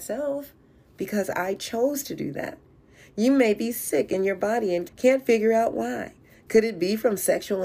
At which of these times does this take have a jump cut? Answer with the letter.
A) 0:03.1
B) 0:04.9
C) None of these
B